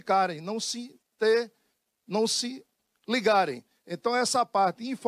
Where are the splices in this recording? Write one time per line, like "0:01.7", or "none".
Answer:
none

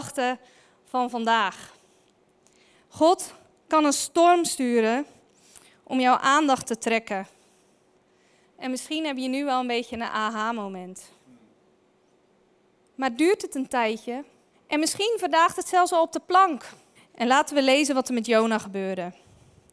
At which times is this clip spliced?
0:12.8
0:14.5
0:17.0

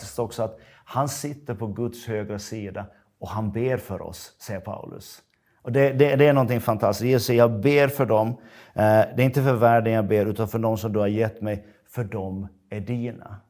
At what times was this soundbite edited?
none

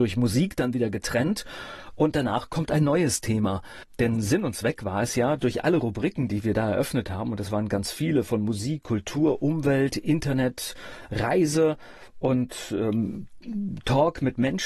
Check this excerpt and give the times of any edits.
0:05.4

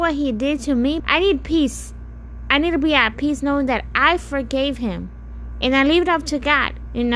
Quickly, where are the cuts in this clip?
0:01.0

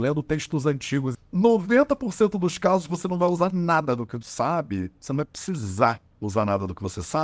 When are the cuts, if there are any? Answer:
0:01.1

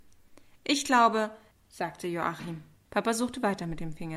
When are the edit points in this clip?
0:01.5
0:02.9

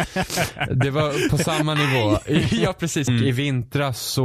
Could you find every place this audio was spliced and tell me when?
0:03.1

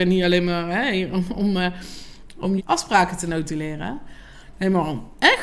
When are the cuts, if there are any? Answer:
0:02.6

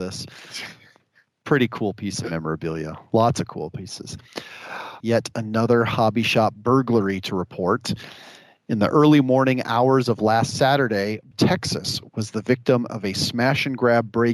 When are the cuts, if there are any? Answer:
0:05.0
0:11.3

